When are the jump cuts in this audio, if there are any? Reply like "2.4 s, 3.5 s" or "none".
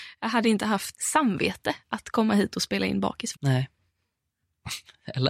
0.9 s, 3.3 s